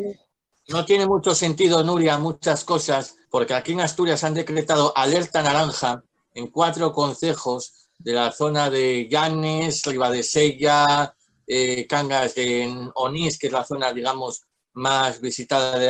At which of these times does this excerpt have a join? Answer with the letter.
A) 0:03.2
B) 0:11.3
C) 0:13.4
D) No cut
A